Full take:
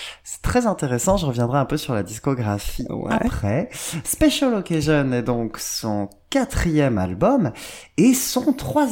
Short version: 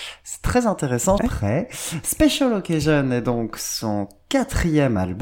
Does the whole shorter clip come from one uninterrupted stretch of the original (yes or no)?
no